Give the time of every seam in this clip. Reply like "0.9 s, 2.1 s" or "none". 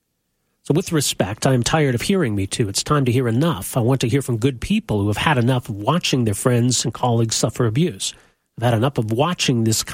none

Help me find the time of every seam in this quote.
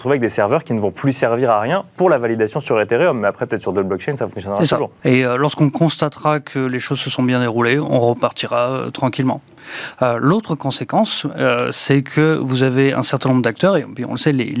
5.0 s

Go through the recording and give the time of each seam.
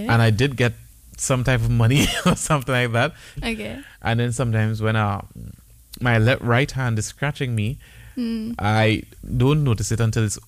3.4 s

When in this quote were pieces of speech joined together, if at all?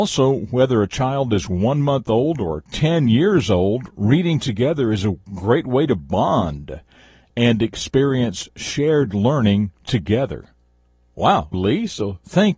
11.5 s

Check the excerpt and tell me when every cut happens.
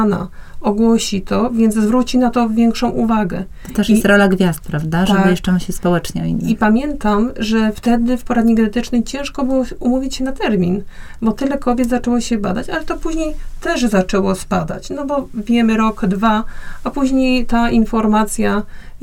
none

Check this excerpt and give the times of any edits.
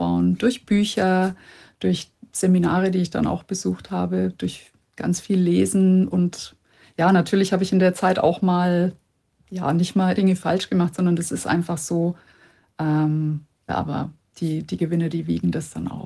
10.2 s, 13.7 s

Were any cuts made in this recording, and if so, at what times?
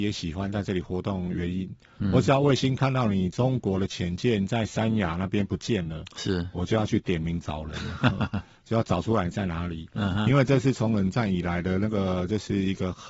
none

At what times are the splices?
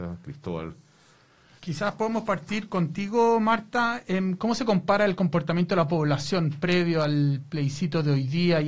1.6 s, 4.4 s

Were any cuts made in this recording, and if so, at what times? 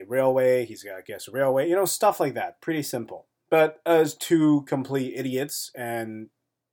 none

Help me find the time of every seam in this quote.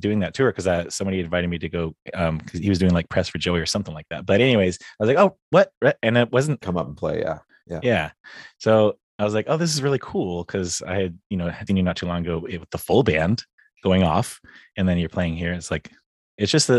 6.6 s, 9.0 s, 11.7 s

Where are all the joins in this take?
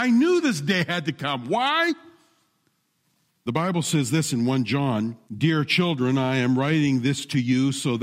3.5 s, 5.3 s

